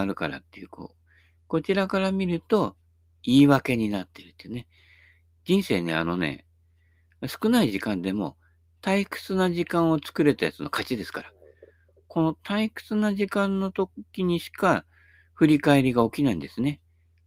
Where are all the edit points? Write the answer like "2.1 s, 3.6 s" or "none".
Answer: none